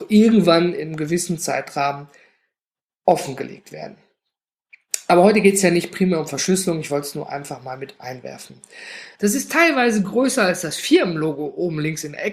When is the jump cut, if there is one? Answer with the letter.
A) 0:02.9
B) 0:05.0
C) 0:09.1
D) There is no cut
C